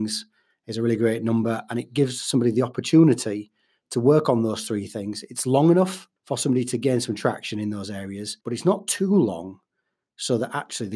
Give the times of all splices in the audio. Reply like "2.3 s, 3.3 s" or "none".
6.2 s, 8.4 s